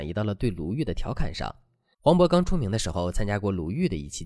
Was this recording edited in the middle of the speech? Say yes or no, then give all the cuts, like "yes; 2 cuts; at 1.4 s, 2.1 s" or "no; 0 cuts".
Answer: yes; 1 cut; at 1.9 s